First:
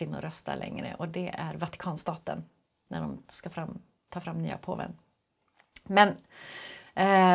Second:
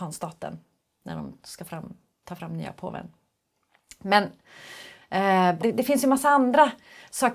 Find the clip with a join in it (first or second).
second